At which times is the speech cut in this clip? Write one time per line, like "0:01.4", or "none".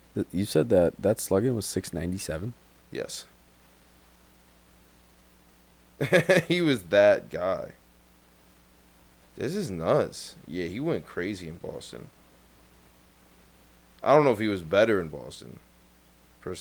none